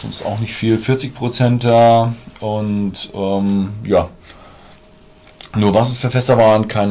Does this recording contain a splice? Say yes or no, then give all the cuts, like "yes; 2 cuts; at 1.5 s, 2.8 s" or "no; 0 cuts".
no; 0 cuts